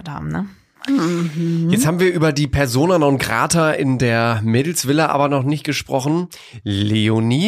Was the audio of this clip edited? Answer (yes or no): no